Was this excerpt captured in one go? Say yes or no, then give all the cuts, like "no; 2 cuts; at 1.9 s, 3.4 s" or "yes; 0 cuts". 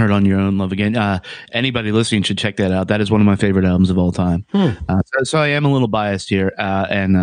yes; 0 cuts